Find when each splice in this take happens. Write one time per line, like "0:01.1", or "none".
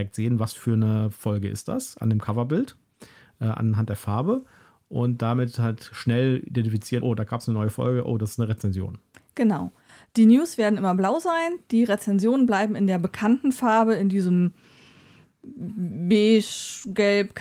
none